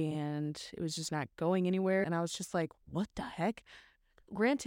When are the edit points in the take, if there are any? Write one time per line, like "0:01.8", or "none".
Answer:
0:02.0